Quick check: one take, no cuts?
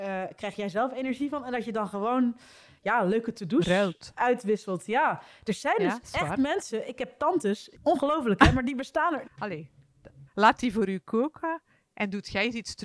no; 3 cuts; at 7.7 s, 9.2 s, 10.3 s

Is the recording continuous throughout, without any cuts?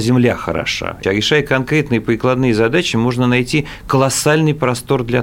no; 1 cut; at 1.0 s

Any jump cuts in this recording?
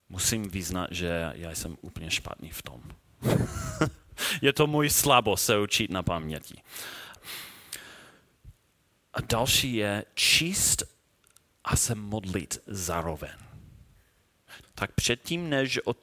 yes; 2 cuts; at 7.2 s, 14.6 s

